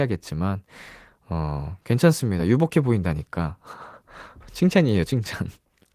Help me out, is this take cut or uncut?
uncut